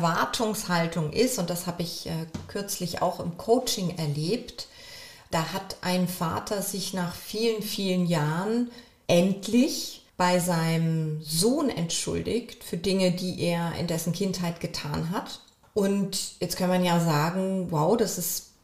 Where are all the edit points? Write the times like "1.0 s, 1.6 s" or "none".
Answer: none